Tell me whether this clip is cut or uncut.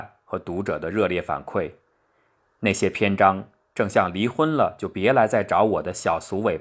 uncut